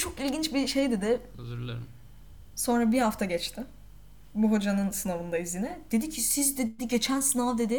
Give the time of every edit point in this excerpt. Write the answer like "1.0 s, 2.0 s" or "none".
1.3 s